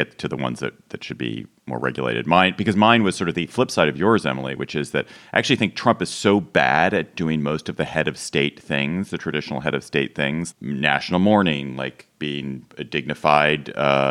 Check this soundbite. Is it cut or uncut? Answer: cut